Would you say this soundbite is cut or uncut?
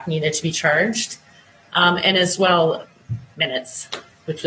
uncut